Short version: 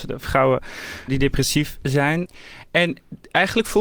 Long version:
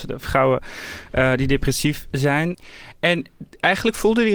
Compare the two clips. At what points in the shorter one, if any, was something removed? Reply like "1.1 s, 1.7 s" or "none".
1.1 s